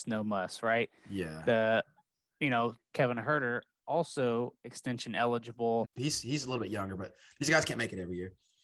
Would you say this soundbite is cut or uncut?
cut